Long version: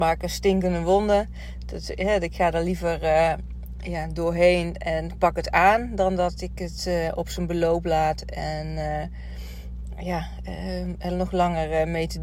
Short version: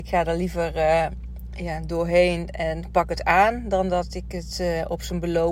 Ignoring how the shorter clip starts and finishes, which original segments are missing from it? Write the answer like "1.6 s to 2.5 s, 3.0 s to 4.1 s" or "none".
none